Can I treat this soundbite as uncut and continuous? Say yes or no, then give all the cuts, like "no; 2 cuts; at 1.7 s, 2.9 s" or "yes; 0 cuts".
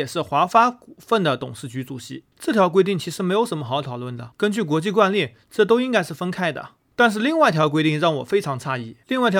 yes; 0 cuts